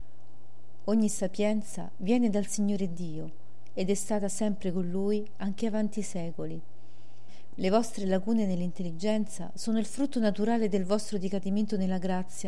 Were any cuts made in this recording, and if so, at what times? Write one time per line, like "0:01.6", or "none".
0:07.5